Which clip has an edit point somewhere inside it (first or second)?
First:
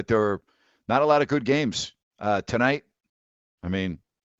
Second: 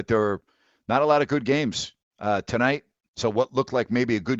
second